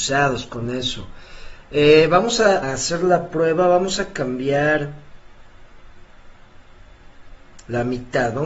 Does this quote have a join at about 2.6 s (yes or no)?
yes